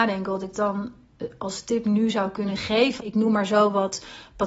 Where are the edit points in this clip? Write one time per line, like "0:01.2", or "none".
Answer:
0:03.0